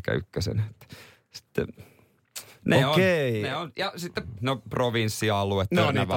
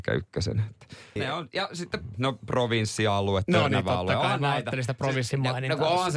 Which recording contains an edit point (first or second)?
second